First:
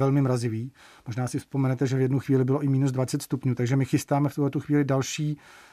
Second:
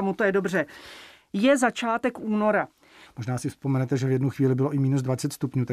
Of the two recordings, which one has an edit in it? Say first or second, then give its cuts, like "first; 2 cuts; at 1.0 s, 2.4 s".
second; 1 cut; at 3.1 s